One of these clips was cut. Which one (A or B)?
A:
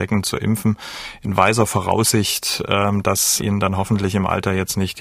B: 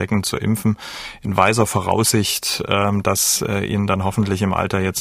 A